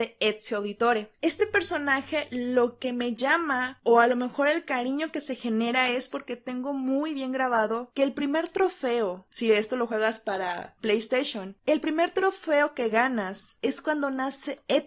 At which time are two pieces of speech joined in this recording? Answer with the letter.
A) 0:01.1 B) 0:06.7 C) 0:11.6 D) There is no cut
A